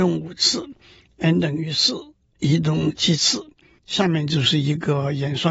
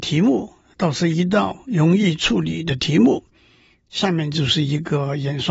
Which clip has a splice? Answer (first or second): first